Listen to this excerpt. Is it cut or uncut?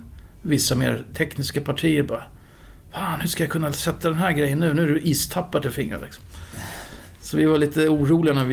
uncut